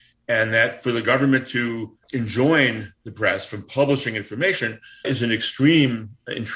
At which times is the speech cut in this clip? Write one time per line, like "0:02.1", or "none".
0:02.0
0:05.0